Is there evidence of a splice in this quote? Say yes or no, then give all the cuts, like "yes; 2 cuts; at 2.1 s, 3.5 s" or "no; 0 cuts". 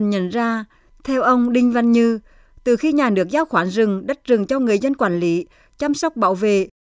no; 0 cuts